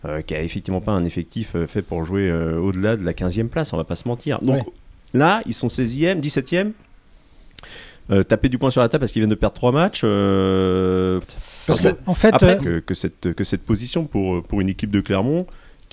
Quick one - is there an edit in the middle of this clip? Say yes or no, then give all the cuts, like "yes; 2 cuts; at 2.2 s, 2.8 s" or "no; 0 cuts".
yes; 2 cuts; at 11.2 s, 12.6 s